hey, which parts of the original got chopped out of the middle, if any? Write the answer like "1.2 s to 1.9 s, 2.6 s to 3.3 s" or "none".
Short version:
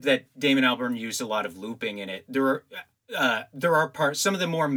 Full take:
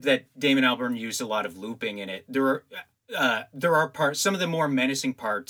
none

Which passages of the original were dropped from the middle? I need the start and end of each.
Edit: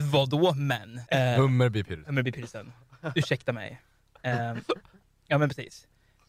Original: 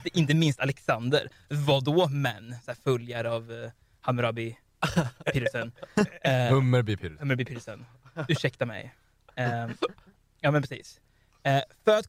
2.6 s to 6.2 s

